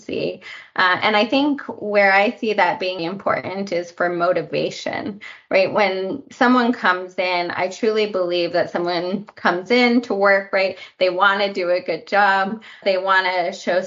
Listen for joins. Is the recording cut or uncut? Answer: cut